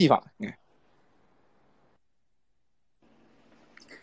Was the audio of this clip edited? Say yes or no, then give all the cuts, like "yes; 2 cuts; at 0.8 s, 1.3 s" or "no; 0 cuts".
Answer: no; 0 cuts